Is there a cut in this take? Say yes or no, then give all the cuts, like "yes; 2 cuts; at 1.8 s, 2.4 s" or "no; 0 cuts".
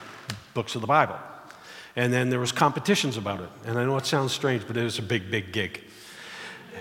no; 0 cuts